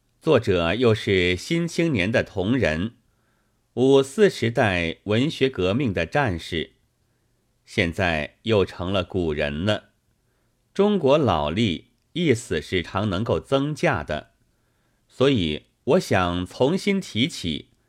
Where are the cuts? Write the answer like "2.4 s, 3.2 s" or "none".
12.8 s